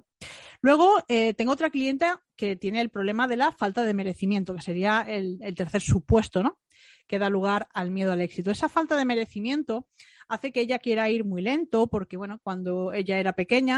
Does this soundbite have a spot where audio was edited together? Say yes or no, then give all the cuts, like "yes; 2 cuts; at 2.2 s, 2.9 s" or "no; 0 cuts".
no; 0 cuts